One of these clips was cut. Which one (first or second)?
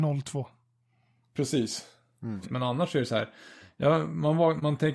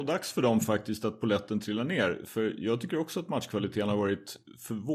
first